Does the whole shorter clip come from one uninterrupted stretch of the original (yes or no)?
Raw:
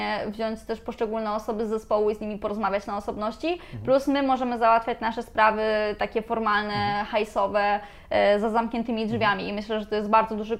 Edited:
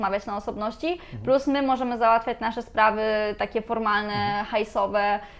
yes